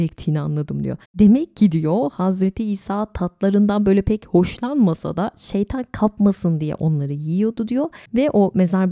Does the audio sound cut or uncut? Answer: cut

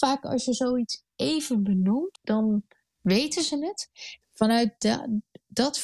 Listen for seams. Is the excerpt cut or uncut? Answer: cut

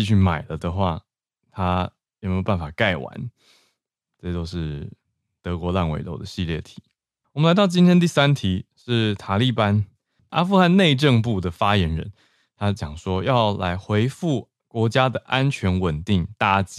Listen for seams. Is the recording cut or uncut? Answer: uncut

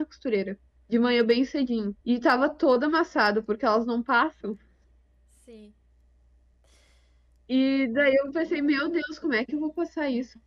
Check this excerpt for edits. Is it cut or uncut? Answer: cut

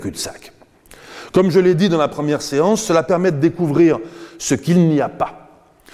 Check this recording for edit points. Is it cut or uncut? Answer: uncut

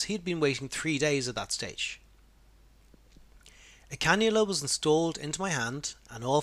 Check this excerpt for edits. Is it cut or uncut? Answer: uncut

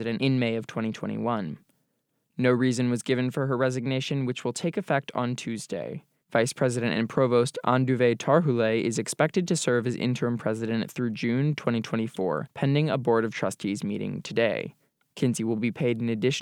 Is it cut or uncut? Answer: uncut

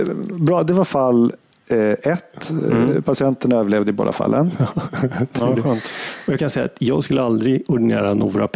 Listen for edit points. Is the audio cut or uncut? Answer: uncut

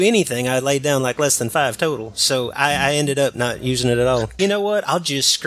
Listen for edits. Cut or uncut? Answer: cut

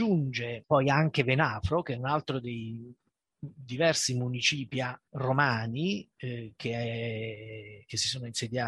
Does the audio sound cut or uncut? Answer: cut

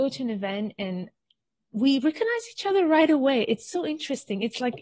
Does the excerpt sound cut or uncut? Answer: uncut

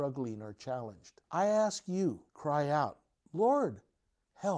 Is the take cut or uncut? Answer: cut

